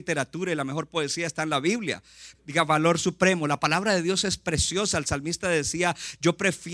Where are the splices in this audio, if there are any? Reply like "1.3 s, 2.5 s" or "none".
2.3 s